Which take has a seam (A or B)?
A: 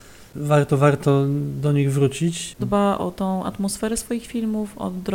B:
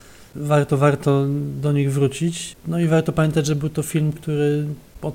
A